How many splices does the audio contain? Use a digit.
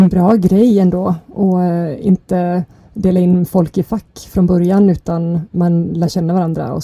0